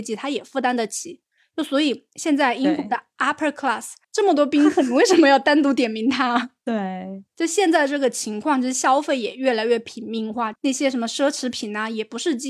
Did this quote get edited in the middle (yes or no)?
yes